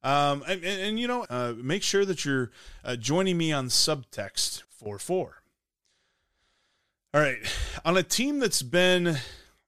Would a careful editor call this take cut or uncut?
cut